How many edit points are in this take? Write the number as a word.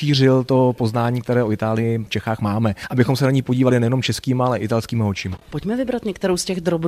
zero